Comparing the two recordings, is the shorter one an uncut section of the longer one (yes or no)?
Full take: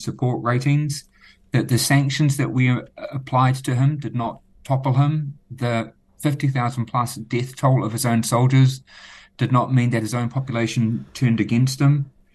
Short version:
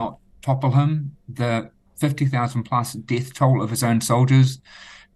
yes